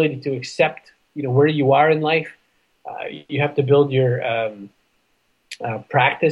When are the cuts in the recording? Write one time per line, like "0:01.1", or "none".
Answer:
none